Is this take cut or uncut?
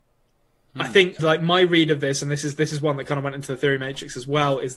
cut